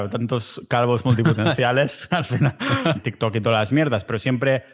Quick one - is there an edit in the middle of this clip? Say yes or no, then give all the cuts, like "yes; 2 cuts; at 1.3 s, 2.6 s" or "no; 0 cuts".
yes; 1 cut; at 3.0 s